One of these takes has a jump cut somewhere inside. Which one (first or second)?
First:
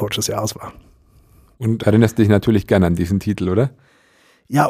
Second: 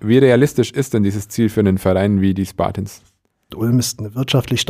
second